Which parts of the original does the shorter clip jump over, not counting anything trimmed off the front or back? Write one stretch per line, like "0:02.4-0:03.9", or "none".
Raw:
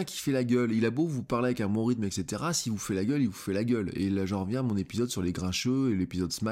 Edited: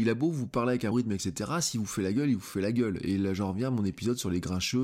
0:01.7-0:01.8